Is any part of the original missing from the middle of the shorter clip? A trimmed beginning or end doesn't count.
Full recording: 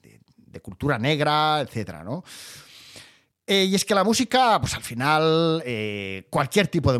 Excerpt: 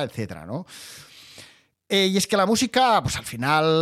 no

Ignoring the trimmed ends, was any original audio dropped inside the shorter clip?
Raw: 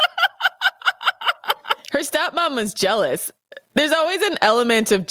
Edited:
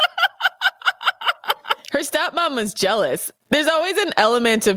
yes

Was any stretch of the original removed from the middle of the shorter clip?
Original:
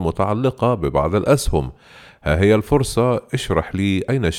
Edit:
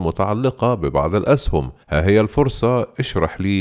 yes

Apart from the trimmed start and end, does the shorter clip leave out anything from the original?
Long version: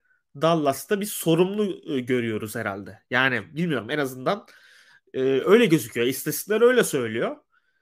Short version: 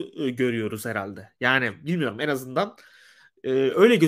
no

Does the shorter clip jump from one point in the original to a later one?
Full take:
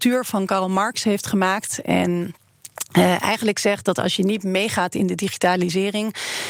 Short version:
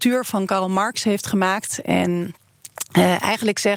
no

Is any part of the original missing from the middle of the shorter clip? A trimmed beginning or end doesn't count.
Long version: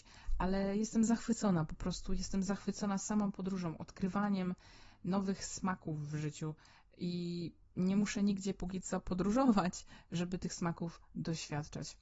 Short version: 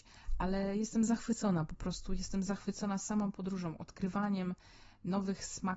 no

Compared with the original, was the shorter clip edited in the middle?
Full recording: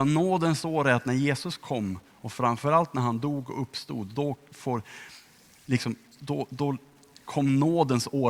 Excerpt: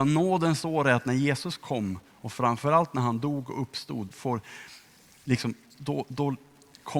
yes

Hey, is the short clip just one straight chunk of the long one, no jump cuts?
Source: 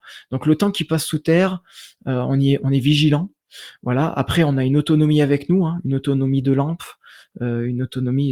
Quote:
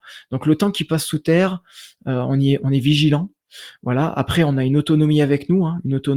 yes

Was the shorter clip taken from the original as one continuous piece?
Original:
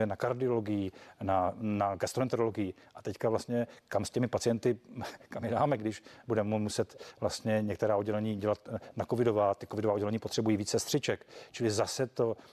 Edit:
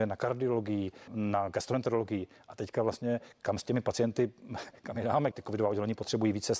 no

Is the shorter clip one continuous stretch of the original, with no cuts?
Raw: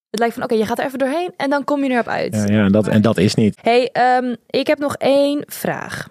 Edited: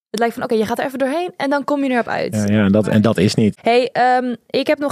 yes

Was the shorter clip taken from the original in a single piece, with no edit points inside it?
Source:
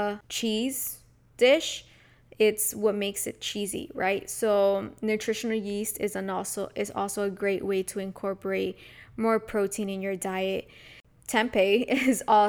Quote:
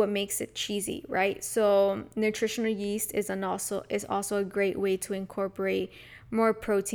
yes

